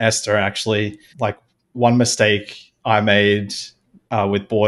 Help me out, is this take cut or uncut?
cut